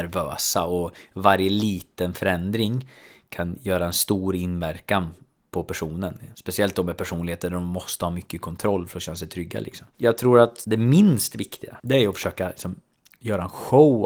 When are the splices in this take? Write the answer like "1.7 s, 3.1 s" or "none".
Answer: none